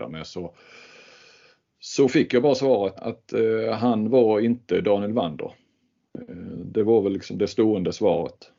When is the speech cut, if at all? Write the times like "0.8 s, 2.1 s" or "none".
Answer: 3.0 s